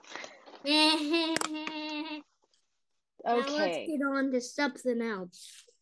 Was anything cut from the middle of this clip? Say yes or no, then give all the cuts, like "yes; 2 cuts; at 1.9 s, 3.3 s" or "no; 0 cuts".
no; 0 cuts